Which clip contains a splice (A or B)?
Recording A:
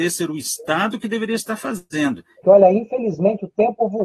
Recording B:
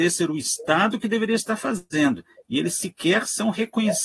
A